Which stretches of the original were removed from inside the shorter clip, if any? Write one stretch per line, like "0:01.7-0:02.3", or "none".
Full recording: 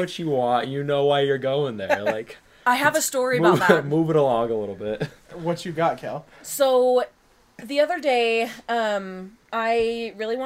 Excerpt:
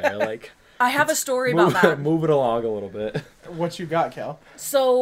none